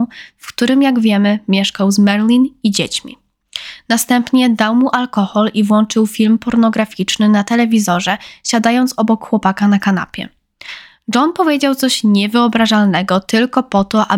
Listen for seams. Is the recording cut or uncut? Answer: uncut